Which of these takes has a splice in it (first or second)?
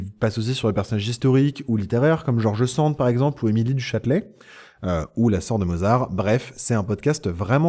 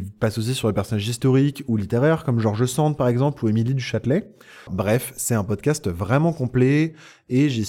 second